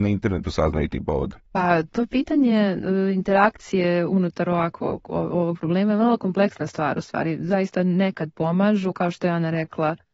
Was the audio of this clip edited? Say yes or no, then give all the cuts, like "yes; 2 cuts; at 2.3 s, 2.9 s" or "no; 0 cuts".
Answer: yes; 1 cut; at 1.5 s